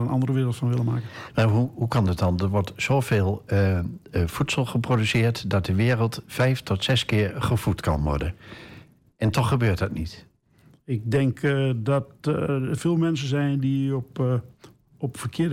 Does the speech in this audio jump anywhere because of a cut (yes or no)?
no